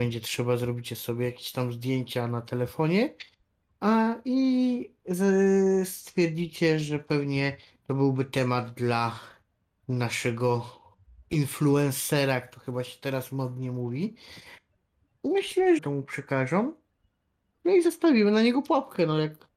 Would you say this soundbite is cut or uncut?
cut